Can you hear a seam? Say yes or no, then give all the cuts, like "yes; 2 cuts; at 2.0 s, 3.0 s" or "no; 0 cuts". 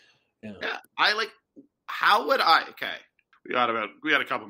yes; 1 cut; at 3.3 s